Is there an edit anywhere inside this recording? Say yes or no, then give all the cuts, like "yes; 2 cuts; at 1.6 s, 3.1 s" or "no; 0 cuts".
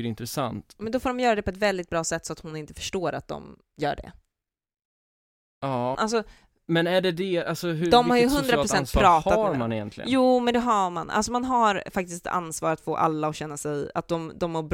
yes; 1 cut; at 6.0 s